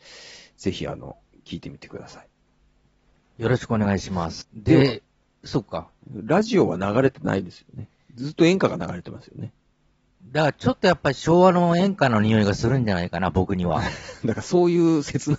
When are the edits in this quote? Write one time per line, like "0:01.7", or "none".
0:04.4
0:06.0